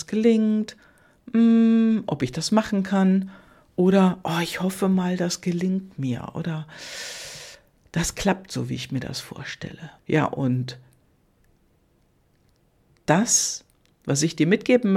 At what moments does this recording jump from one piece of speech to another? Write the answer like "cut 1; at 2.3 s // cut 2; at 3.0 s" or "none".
cut 1; at 10.0 s